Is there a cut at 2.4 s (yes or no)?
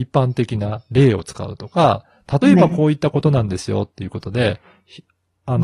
no